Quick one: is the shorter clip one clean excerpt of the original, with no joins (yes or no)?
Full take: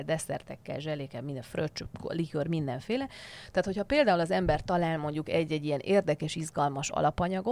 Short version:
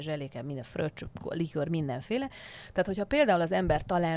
yes